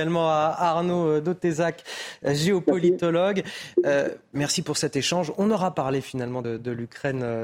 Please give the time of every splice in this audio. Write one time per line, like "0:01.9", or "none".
none